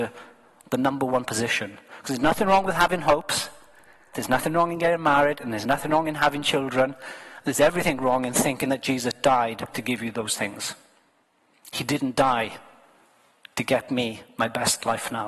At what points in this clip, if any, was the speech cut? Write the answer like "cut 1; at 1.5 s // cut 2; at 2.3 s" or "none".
cut 1; at 4.1 s // cut 2; at 9.7 s